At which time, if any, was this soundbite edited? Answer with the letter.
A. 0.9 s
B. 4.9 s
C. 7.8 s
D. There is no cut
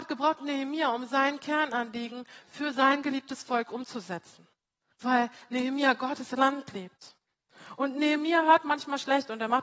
B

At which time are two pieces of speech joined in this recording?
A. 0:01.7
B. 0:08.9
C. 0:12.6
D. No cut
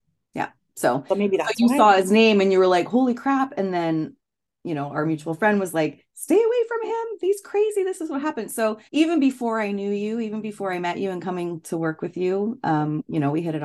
B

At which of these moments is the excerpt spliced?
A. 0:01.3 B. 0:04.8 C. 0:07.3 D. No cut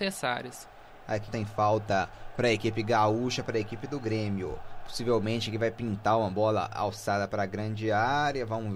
A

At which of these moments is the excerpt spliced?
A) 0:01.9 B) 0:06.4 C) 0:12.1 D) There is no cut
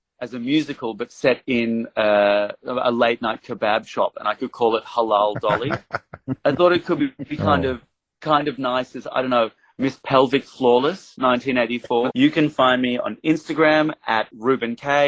C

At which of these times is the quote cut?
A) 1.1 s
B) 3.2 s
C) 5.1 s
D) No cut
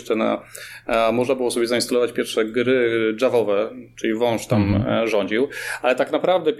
D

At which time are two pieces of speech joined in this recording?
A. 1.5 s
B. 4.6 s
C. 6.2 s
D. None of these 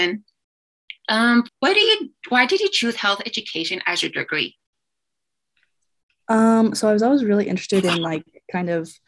A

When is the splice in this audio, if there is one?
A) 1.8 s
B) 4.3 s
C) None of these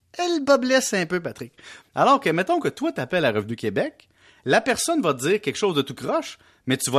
A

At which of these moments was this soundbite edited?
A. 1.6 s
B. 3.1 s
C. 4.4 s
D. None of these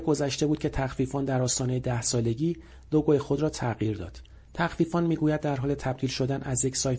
D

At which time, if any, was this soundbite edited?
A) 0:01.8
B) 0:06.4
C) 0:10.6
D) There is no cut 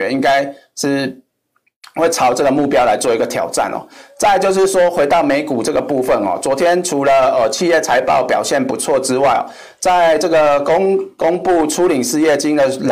D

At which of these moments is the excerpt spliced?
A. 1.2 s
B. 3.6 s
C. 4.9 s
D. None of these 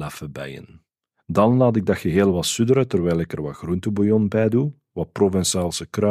C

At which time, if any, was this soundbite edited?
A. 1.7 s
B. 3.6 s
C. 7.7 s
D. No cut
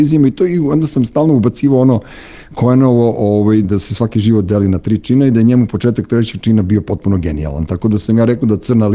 B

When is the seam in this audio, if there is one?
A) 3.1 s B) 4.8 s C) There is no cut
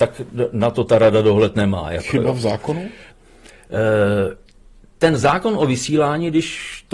A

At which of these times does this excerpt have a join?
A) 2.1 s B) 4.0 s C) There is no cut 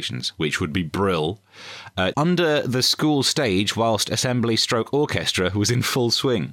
A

